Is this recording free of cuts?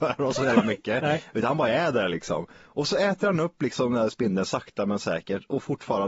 yes; 0 cuts

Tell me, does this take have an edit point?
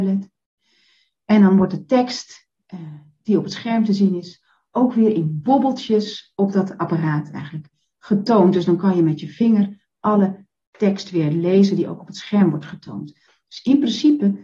no; 0 cuts

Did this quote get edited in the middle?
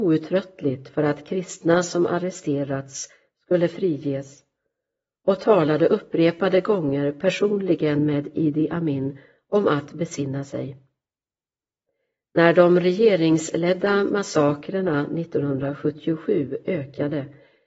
no; 0 cuts

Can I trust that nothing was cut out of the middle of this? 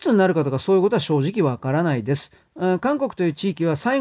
yes; 0 cuts

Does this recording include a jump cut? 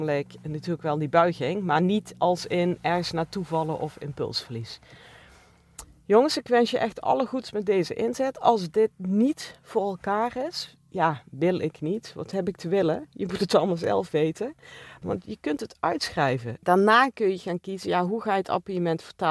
yes; 2 cuts; at 15.0 s, 16.6 s

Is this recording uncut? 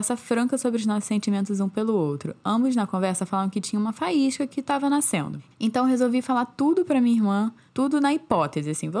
no; 1 cut; at 5.5 s

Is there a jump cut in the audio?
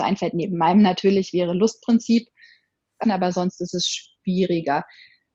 yes; 1 cut; at 3.0 s

